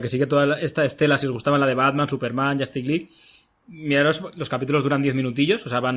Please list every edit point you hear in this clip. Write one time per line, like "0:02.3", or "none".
0:04.3